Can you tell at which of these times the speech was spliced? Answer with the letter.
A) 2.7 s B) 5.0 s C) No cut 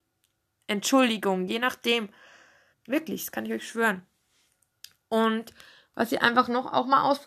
A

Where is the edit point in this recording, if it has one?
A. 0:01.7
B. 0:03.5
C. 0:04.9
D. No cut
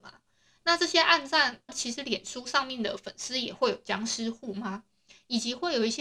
A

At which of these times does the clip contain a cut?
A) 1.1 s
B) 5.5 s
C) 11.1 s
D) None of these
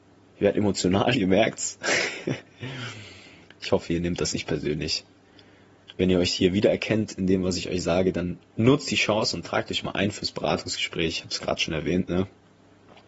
A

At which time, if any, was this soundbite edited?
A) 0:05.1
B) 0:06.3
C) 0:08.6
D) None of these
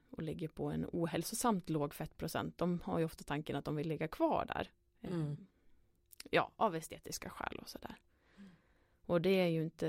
D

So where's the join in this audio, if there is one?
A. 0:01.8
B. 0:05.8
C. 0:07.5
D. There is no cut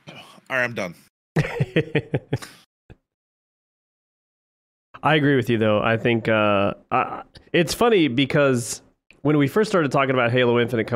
C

